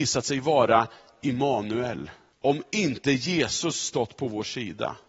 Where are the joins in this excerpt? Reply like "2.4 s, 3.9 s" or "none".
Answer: 2.3 s